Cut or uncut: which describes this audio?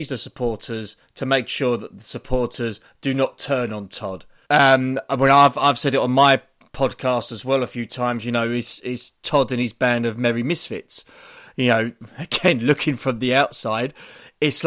cut